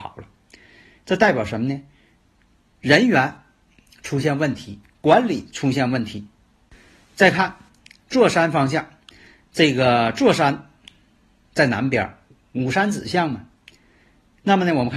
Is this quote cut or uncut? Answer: uncut